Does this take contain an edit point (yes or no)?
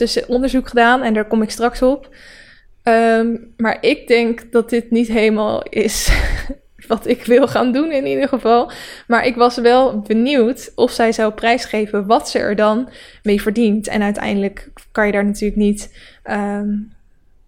no